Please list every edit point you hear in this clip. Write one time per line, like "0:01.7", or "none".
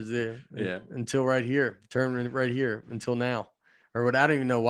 none